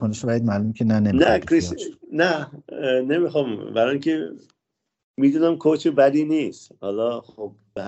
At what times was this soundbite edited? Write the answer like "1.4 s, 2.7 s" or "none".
none